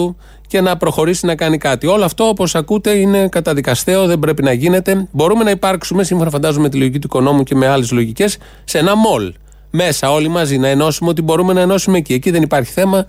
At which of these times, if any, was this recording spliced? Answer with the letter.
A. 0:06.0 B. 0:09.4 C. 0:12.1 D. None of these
D